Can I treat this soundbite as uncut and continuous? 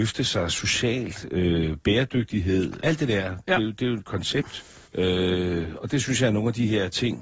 no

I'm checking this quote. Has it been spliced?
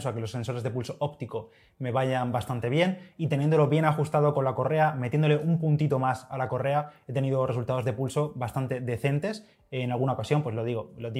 no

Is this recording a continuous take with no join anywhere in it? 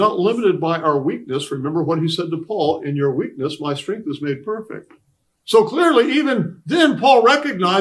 no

